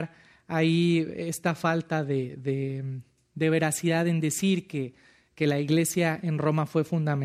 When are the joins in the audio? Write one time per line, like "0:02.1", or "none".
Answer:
none